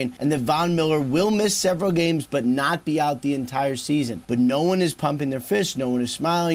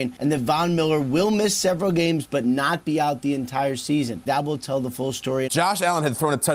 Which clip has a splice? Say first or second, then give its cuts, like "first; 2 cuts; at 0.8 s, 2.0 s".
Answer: second; 2 cuts; at 4.3 s, 5.5 s